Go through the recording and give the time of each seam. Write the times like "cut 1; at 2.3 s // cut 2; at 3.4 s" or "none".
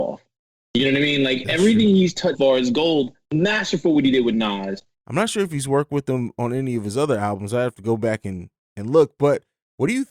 cut 1; at 2.3 s // cut 2; at 4.9 s